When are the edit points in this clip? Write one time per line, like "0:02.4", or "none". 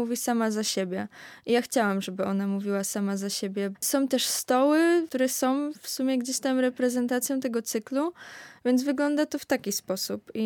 0:03.7